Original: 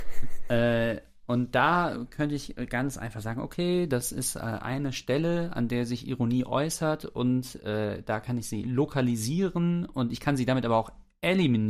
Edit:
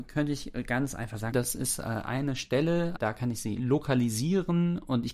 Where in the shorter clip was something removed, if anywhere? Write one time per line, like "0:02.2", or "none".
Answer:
0:01.3
0:03.0